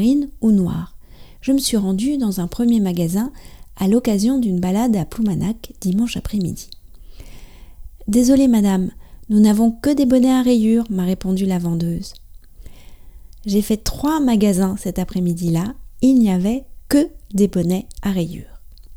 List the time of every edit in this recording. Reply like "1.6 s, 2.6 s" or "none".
none